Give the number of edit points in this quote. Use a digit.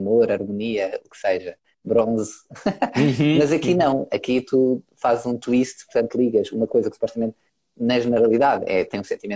0